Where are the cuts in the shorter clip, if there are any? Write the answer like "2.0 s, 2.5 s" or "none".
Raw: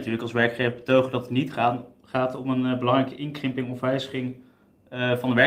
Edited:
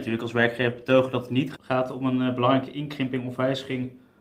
1.5 s